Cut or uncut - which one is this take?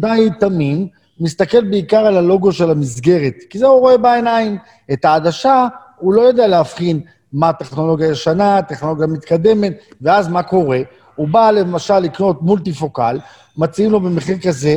uncut